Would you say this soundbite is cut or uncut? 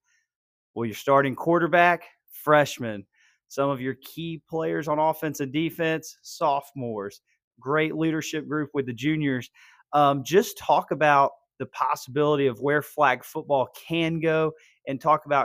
uncut